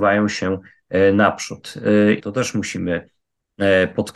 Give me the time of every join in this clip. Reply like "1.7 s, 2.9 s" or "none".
2.2 s